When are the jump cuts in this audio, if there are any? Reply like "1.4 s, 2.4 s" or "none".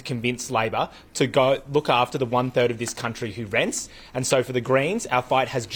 none